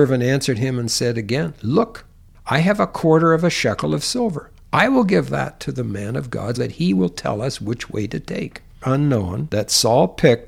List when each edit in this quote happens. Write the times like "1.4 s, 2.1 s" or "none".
6.6 s, 8.8 s